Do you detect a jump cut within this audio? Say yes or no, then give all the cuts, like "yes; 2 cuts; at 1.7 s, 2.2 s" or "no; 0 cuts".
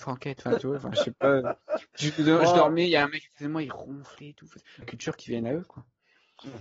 yes; 1 cut; at 4.8 s